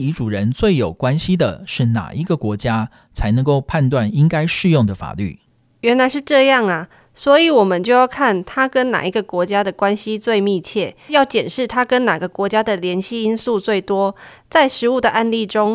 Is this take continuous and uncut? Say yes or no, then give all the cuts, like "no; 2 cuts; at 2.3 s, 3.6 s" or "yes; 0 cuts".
no; 1 cut; at 11.1 s